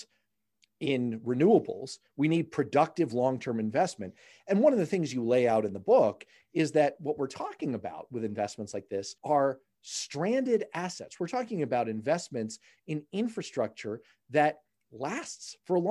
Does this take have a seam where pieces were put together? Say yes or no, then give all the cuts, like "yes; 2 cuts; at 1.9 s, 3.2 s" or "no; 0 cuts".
yes; 1 cut; at 9.2 s